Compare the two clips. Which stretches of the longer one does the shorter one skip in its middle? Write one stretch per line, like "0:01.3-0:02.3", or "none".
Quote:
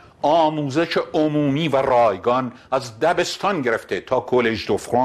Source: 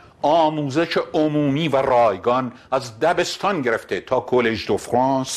none